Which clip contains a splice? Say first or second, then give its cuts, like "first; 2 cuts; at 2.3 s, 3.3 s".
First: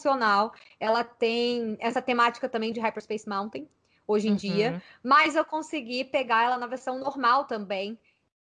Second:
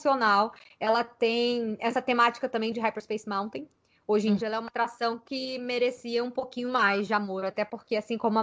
second; 1 cut; at 4.4 s